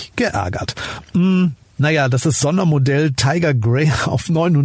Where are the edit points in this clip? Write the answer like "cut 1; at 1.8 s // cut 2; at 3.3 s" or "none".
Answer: none